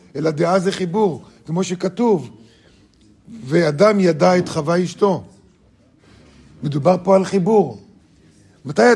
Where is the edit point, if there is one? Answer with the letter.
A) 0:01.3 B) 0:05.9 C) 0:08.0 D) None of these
D